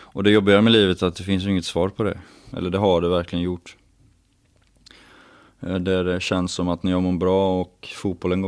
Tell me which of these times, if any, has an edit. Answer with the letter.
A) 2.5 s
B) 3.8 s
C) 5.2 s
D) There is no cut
A